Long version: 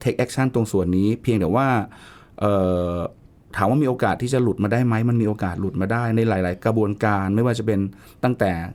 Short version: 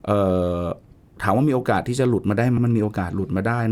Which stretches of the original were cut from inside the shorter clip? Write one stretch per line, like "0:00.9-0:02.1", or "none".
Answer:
0:04.9-0:05.0